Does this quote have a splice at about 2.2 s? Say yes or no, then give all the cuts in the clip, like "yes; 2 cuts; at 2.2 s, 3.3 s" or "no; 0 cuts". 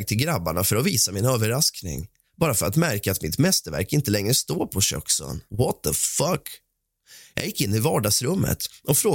no; 1 cut; at 5.5 s